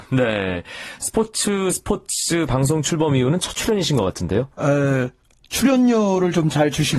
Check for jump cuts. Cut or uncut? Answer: cut